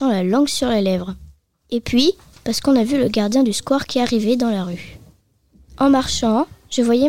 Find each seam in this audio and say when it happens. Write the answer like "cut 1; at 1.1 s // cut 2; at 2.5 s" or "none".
cut 1; at 2.3 s

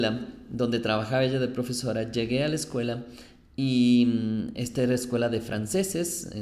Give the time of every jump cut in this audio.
none

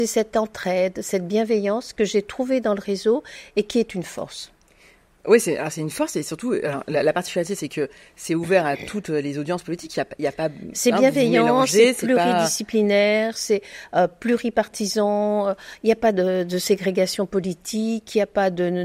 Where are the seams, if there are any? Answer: none

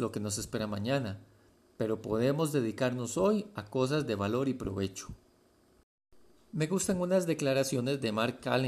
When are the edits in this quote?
none

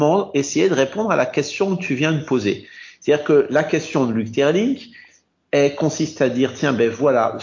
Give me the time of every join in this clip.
none

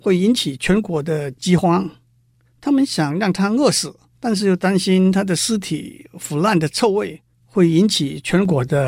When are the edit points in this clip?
cut 1; at 4.1 s // cut 2; at 7.3 s

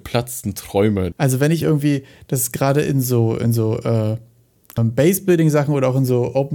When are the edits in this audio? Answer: cut 1; at 1.1 s // cut 2; at 4.8 s

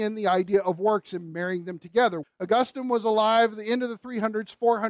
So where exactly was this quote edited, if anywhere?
cut 1; at 2.2 s

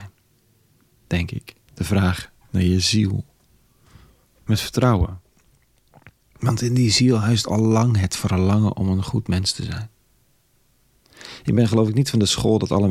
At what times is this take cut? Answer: cut 1; at 1.7 s

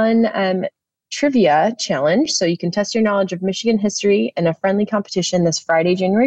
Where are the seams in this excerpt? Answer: none

